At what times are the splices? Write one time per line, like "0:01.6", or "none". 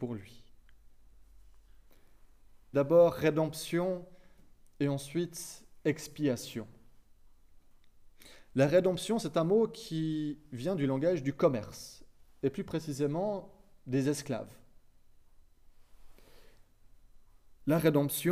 0:02.7